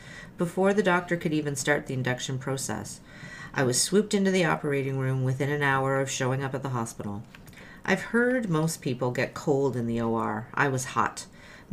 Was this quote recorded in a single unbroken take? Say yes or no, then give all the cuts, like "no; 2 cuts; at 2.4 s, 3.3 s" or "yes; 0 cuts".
yes; 0 cuts